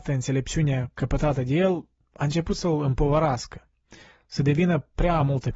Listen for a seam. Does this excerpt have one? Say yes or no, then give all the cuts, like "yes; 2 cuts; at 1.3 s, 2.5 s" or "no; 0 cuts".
no; 0 cuts